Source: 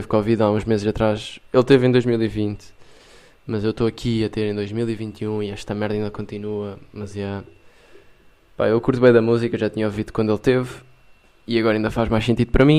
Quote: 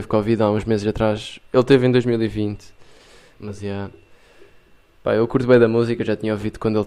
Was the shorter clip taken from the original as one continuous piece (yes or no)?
no